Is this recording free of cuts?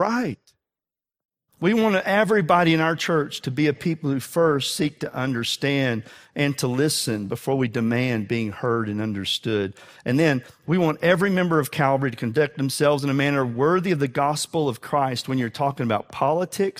no; 1 cut; at 1.5 s

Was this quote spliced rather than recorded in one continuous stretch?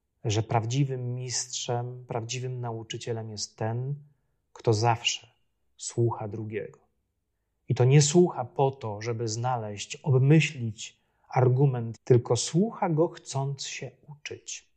yes; 1 cut; at 12.0 s

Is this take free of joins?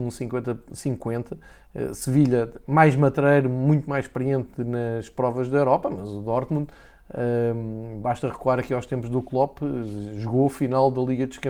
yes; 0 cuts

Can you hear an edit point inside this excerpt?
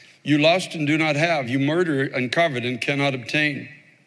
no; 0 cuts

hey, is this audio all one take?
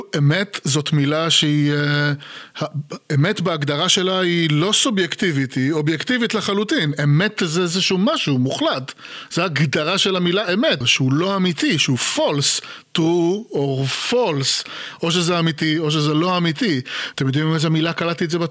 no; 2 cuts; at 10.8 s, 17.1 s

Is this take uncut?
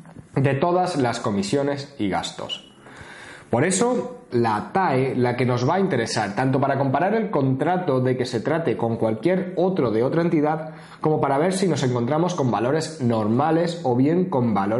no; 1 cut; at 4.3 s

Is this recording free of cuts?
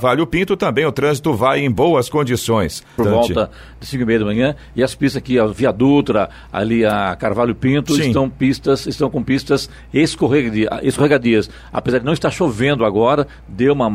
no; 1 cut; at 3.0 s

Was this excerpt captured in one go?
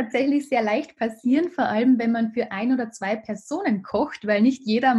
yes; 0 cuts

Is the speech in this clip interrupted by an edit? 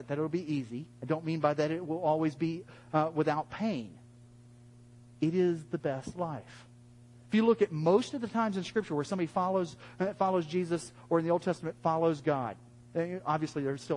no; 0 cuts

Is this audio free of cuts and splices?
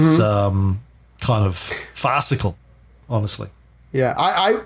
yes; 0 cuts

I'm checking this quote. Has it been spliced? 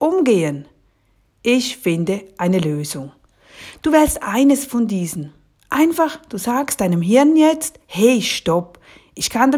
no; 0 cuts

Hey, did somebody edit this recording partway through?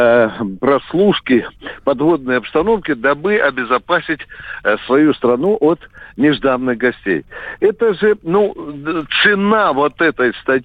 no; 0 cuts

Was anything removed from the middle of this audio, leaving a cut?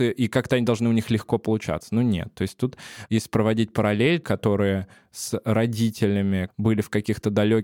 yes; 2 cuts; at 4.2 s, 6.5 s

